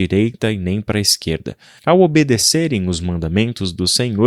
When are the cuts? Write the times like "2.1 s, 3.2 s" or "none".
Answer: 1.8 s